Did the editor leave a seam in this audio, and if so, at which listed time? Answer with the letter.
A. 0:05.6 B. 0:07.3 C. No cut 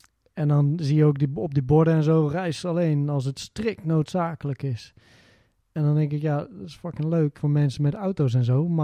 B